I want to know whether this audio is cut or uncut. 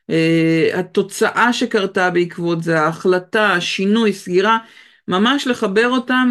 uncut